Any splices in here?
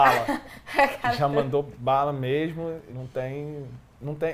yes; 1 cut; at 2.9 s

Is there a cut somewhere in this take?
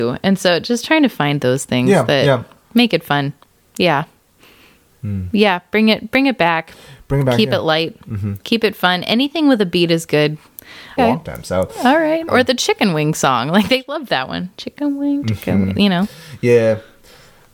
yes; 3 cuts; at 8.4 s, 11.0 s, 12.3 s

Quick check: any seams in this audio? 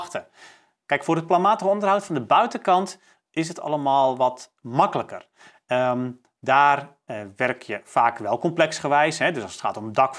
no; 0 cuts

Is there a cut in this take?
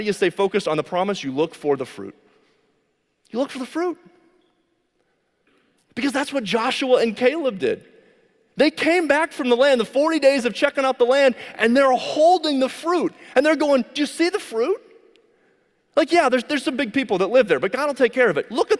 no; 0 cuts

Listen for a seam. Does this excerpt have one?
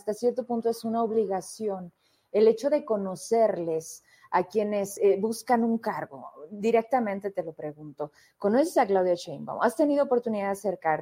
no; 0 cuts

